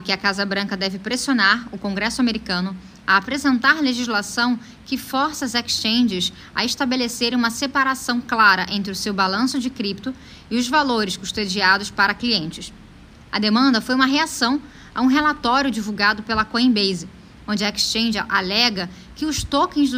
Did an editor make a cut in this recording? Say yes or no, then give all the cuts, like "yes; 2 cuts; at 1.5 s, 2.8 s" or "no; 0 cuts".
no; 0 cuts